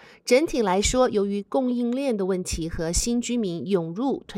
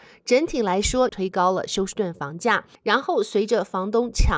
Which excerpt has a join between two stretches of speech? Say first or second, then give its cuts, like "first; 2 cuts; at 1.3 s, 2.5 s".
second; 2 cuts; at 1.1 s, 2.8 s